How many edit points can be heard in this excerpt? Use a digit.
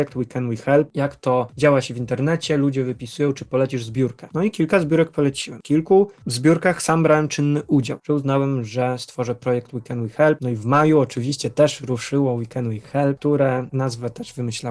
1